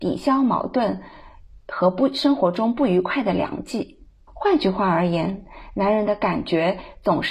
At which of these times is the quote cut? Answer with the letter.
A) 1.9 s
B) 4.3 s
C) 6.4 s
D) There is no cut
B